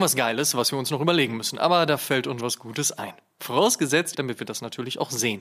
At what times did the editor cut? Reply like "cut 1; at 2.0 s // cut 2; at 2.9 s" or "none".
cut 1; at 2.4 s // cut 2; at 4.1 s